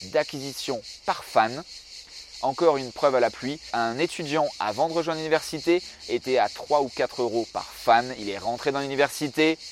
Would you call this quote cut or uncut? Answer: uncut